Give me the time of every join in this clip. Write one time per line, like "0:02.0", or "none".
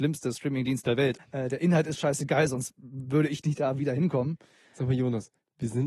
0:01.2